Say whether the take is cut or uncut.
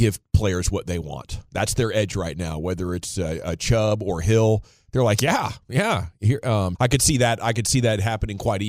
cut